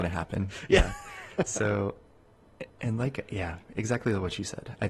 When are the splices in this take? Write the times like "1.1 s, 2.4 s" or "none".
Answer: 2.7 s